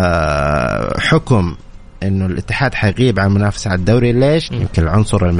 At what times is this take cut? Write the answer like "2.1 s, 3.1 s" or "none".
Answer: 4.5 s